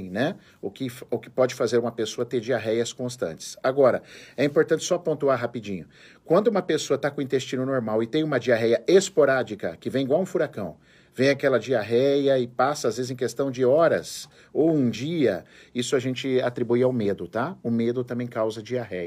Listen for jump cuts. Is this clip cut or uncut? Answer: uncut